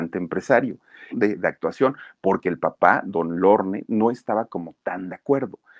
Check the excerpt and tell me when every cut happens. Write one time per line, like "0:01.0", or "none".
0:01.1